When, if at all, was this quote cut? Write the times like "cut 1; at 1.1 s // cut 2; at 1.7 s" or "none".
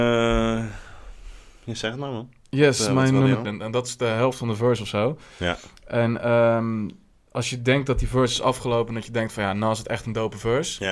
cut 1; at 3.4 s